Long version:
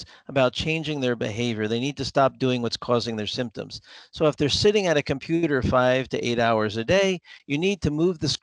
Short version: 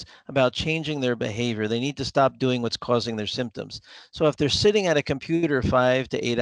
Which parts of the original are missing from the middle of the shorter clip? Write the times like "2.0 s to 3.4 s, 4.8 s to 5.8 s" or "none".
none